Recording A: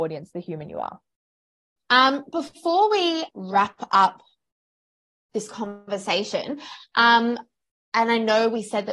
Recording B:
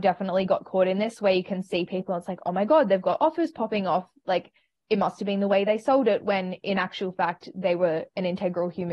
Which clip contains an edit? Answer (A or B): A